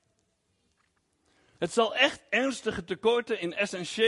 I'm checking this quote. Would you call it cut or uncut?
cut